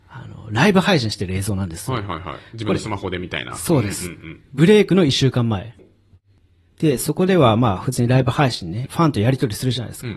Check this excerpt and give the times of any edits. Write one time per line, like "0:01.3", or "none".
0:04.5
0:08.9